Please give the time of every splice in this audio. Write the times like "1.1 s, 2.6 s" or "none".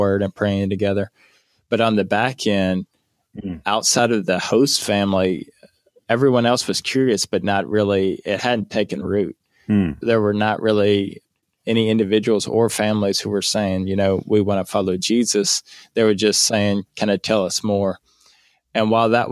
none